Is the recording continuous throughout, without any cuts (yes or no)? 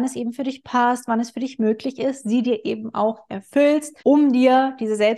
no